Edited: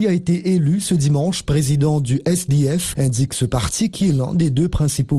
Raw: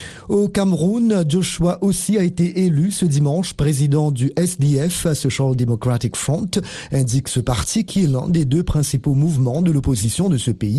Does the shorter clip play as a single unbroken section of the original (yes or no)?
no